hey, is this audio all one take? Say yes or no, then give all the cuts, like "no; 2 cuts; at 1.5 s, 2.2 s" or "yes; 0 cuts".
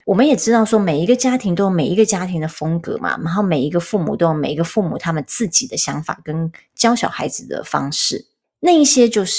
yes; 0 cuts